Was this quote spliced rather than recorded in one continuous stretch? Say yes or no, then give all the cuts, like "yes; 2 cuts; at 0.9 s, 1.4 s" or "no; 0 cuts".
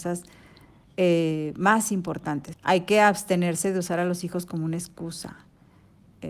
yes; 1 cut; at 2.5 s